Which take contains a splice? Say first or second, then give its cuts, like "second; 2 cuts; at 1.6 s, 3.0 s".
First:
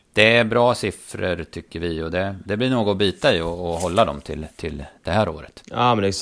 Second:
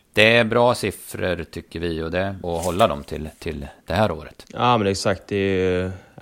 second; 1 cut; at 2.4 s